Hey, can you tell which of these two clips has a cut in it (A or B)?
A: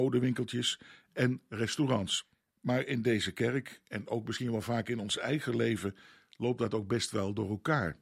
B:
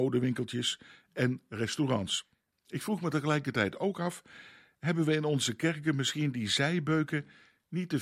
B